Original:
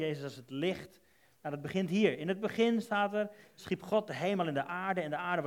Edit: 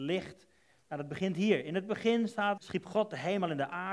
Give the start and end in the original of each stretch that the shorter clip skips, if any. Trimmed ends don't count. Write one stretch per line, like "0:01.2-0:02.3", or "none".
0:03.1-0:03.5